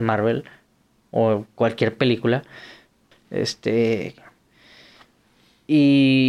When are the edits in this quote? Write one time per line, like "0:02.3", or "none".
0:03.1